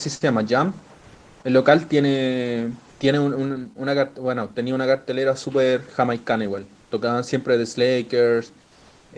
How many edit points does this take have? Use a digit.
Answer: 0